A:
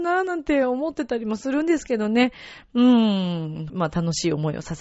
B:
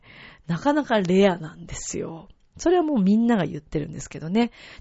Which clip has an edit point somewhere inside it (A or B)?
A